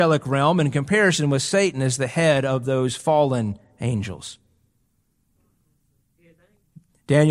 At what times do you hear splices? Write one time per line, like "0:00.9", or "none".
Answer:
none